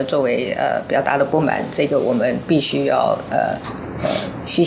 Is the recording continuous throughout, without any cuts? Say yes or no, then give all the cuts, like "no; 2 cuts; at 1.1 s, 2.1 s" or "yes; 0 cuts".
yes; 0 cuts